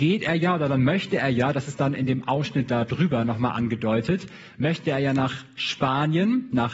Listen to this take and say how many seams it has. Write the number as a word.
zero